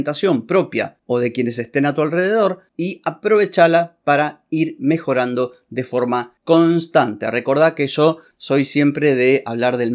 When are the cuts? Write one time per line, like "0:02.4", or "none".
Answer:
none